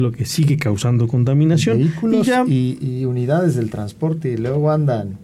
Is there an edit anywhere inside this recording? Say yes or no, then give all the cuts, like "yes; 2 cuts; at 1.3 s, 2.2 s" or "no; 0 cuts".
no; 0 cuts